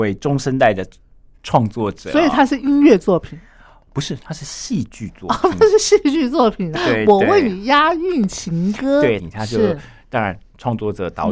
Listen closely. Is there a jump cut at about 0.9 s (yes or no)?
no